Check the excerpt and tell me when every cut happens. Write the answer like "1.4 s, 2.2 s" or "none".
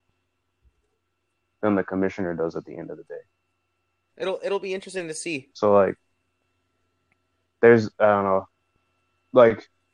4.1 s, 5.5 s